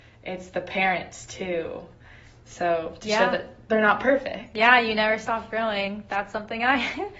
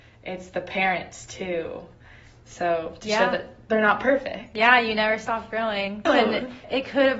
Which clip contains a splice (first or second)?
second